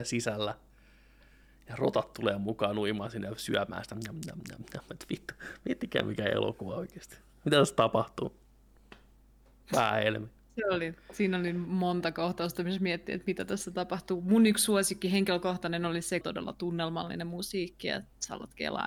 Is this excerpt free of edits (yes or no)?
no